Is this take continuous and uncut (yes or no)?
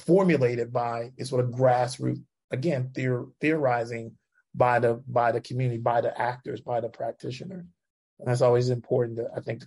yes